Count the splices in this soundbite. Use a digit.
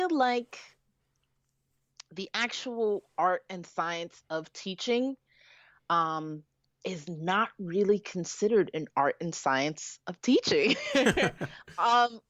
0